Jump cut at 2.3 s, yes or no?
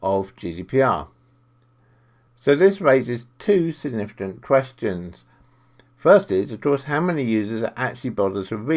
no